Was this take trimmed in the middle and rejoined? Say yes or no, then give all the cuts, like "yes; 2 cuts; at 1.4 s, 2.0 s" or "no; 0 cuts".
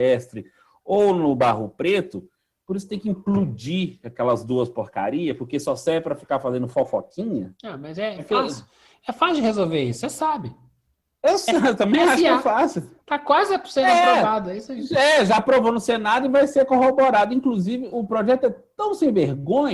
yes; 1 cut; at 17.9 s